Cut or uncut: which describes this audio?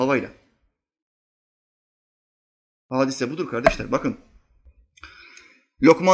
uncut